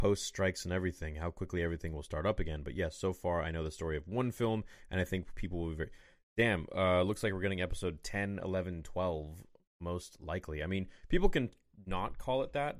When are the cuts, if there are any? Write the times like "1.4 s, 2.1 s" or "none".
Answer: none